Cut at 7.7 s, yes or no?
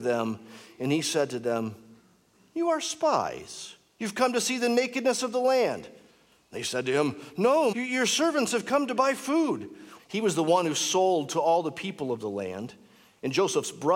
yes